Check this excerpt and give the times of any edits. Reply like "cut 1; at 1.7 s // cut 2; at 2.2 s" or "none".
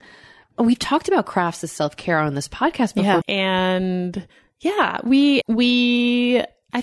cut 1; at 3.2 s // cut 2; at 5.4 s